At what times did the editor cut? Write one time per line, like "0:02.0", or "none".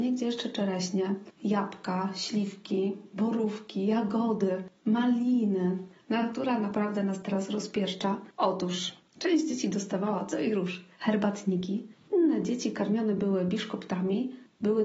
0:08.3